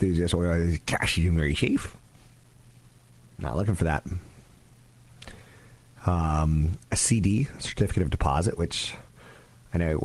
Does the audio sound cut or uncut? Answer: uncut